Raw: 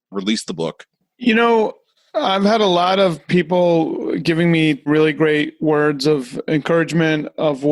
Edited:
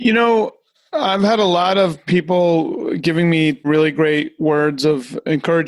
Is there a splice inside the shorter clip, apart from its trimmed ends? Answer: no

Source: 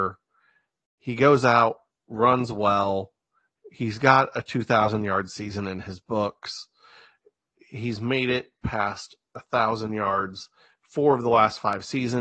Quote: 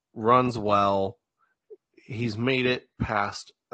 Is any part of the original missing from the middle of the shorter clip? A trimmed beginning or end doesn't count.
yes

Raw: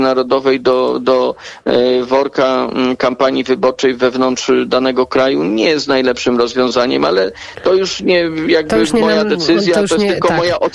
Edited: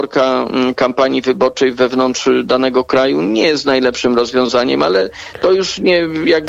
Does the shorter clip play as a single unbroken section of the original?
yes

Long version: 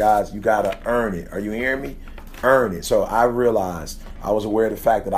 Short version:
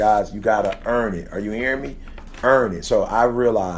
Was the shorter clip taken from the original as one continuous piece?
yes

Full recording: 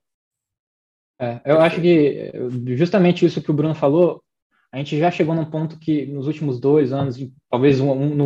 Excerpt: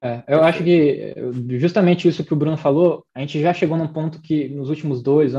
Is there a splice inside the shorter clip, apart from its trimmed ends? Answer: yes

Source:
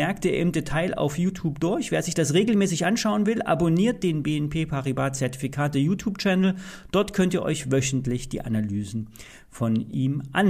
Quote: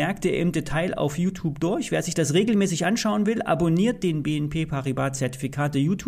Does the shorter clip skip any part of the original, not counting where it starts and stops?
no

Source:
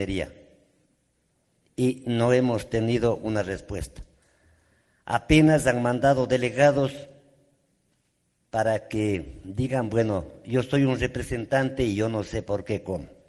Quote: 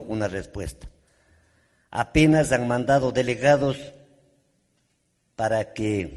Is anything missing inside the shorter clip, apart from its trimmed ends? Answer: no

